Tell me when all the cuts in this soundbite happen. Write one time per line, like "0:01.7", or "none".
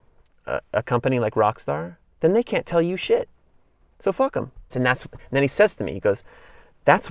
0:04.7